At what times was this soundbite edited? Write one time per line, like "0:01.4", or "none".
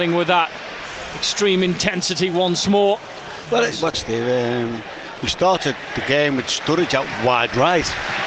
0:03.9